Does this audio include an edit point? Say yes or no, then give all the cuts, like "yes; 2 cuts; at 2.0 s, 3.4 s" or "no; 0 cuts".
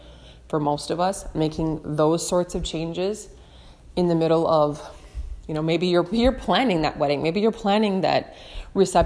yes; 1 cut; at 6.1 s